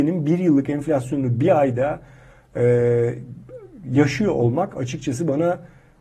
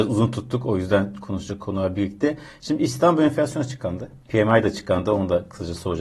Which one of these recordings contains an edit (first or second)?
second